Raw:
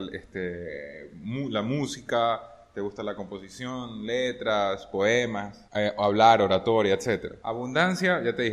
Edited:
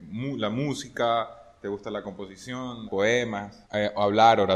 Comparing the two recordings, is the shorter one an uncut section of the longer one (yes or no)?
no